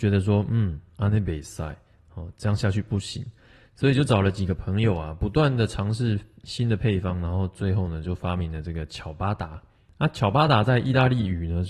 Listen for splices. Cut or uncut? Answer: uncut